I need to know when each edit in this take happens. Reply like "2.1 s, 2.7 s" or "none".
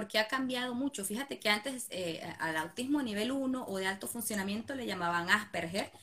none